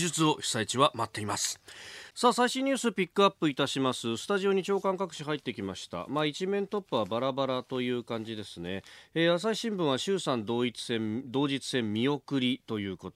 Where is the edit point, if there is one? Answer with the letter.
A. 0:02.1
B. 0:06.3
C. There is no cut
A